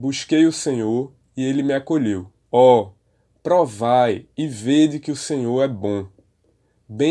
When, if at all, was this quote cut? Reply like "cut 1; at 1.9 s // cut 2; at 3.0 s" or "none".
cut 1; at 2.5 s